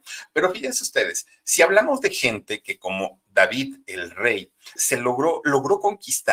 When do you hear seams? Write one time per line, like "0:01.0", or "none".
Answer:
0:04.8